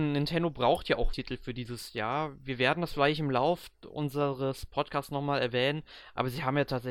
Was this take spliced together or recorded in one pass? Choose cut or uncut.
cut